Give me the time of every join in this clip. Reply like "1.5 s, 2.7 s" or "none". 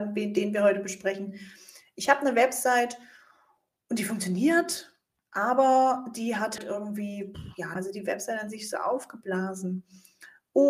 6.6 s, 7.8 s